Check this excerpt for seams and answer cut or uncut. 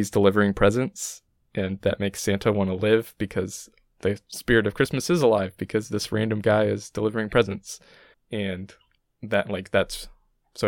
cut